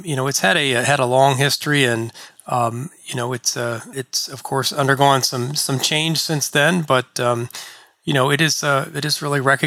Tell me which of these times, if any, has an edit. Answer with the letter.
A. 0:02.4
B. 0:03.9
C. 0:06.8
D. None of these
B